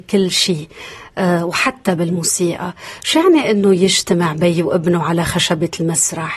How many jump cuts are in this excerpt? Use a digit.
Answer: 0